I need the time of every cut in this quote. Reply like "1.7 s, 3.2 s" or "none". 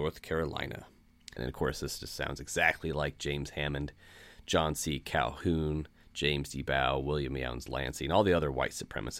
1.4 s